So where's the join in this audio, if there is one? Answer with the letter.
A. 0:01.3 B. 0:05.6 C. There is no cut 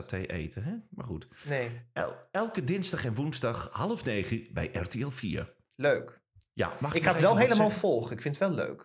B